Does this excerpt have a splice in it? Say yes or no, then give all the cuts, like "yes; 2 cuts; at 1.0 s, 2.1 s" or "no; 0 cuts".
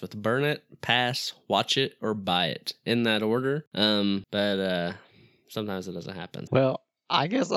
yes; 2 cuts; at 4.2 s, 6.5 s